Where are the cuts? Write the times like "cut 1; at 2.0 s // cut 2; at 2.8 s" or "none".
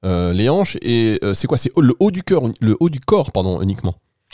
none